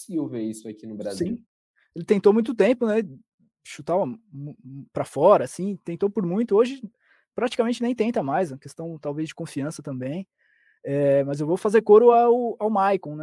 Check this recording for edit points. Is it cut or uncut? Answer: uncut